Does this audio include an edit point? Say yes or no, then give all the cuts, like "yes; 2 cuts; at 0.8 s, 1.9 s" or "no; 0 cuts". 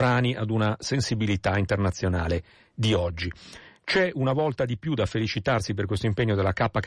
no; 0 cuts